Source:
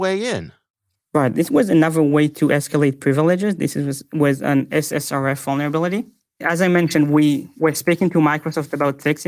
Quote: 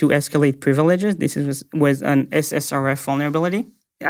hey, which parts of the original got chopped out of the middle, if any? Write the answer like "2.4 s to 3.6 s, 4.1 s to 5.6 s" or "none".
none